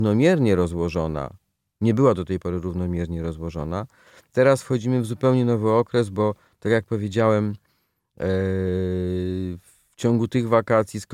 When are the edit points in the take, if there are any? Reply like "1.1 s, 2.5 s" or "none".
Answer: none